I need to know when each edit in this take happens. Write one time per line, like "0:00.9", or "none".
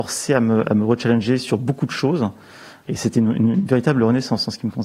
0:02.8